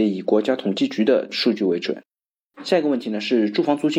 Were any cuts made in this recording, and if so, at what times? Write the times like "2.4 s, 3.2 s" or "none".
none